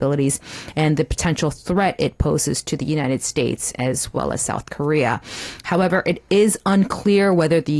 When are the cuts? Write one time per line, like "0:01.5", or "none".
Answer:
none